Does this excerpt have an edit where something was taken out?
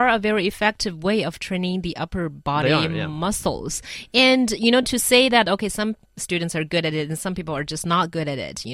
no; 0 cuts

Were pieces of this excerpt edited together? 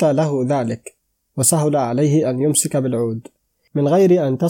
no; 0 cuts

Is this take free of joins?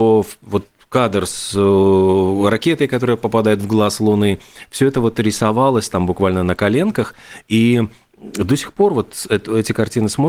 yes; 0 cuts

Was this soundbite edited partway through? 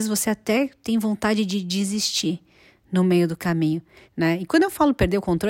yes; 1 cut; at 4.1 s

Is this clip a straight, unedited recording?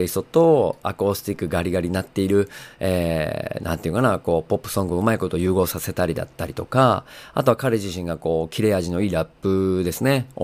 yes; 0 cuts

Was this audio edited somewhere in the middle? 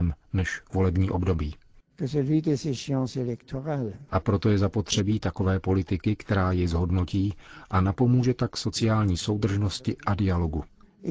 yes; 1 cut; at 4.1 s

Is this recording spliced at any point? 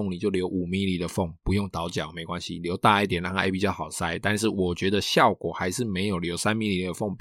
no; 0 cuts

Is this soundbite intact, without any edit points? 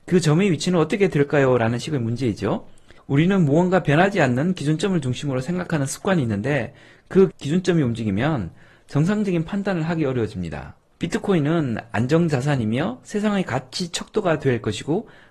no; 3 cuts; at 3.0 s, 7.3 s, 10.9 s

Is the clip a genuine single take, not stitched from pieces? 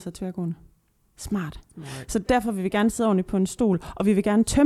no; 1 cut; at 1.7 s

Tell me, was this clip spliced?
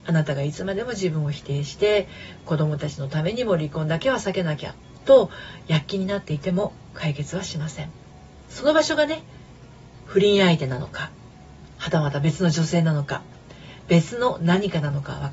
yes; 1 cut; at 8.4 s

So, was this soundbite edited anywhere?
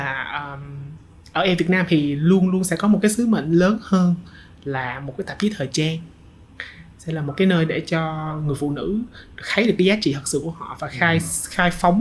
no; 0 cuts

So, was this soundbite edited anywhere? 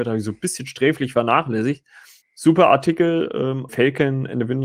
yes; 2 cuts; at 2.2 s, 3.7 s

